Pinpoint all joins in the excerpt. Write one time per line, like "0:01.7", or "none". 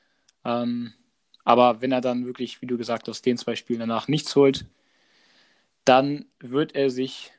none